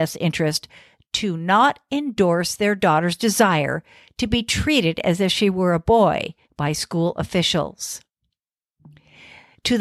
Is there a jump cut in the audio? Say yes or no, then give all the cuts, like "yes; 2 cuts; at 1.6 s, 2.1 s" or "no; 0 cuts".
yes; 1 cut; at 6.4 s